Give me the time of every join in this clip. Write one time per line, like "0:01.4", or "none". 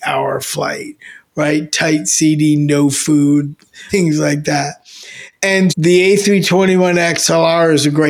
0:03.9
0:05.7